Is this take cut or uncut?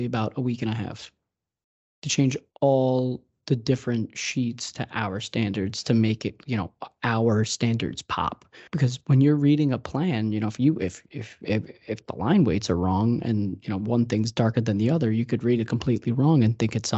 cut